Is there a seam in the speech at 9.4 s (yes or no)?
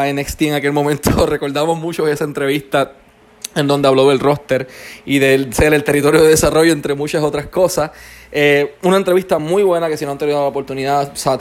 no